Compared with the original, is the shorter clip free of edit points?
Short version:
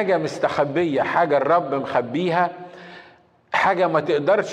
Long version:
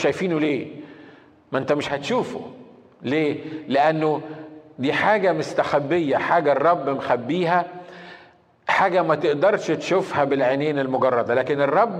yes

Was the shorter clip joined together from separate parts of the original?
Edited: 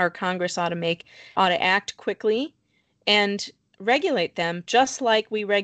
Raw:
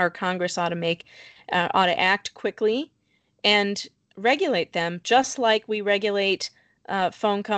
yes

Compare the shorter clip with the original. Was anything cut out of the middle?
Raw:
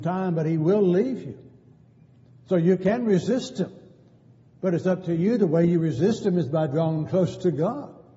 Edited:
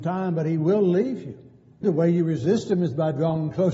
yes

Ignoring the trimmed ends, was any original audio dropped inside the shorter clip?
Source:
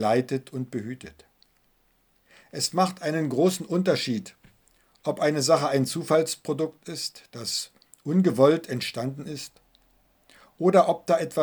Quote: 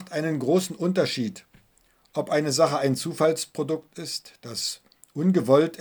no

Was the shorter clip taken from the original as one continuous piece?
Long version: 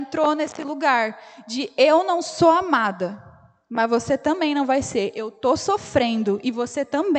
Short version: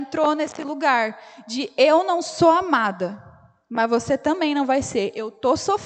yes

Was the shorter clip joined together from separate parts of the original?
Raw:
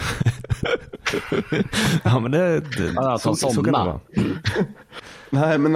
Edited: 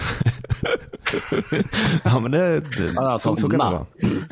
yes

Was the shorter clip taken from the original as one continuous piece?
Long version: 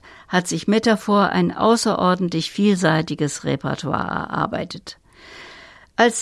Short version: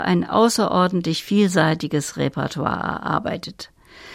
yes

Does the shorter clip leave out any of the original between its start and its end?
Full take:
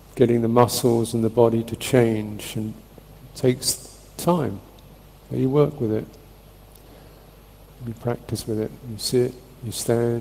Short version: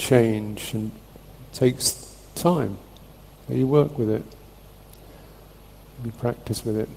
no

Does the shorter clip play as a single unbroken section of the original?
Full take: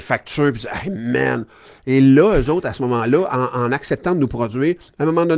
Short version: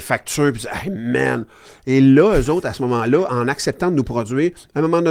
no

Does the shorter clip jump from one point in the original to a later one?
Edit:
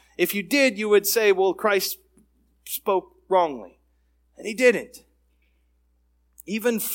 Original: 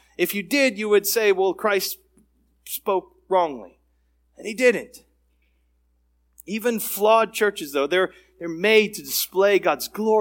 no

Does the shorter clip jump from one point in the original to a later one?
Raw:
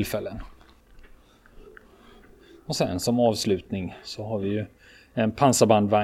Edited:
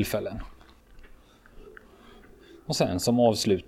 no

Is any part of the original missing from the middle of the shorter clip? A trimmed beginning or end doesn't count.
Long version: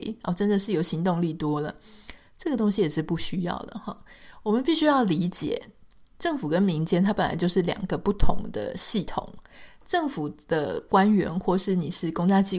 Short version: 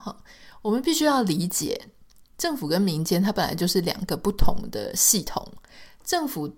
no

